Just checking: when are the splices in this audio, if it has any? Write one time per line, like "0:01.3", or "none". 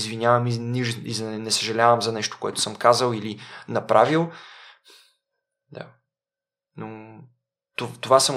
none